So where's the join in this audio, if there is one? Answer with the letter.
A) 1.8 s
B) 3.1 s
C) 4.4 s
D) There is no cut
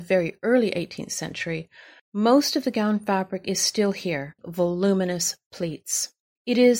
C